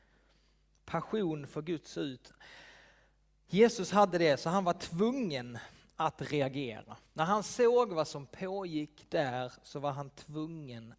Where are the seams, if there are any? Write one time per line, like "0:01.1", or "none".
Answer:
0:07.1